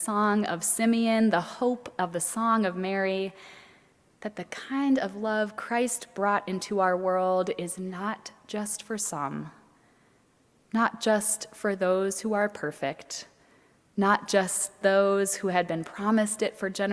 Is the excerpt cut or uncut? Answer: uncut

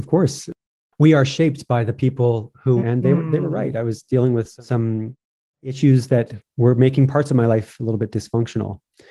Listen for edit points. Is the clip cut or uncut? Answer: cut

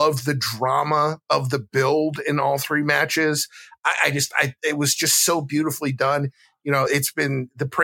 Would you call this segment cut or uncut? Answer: uncut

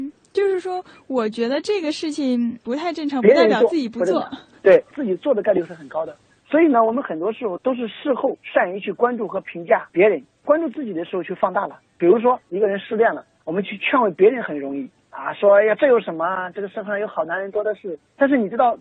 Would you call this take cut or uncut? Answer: uncut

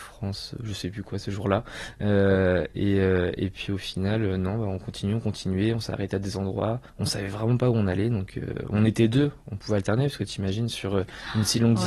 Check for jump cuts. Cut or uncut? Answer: uncut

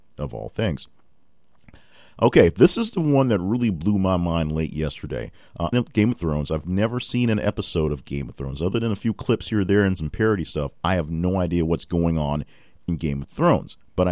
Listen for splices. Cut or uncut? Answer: cut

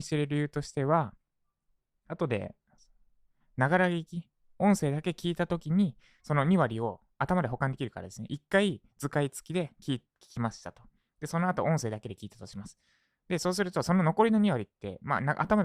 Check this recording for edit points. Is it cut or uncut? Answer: cut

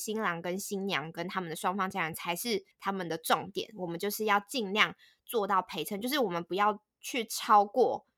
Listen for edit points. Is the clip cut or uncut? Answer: cut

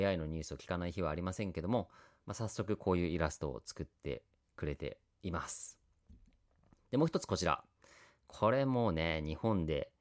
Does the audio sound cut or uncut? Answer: uncut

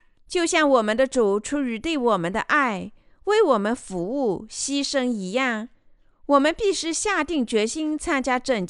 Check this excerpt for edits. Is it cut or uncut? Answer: uncut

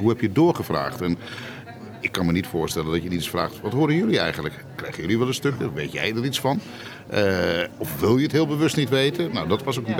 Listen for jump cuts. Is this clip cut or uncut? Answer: uncut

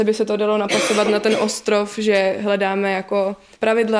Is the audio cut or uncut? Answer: uncut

